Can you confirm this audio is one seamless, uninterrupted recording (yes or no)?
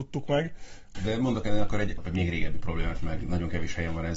no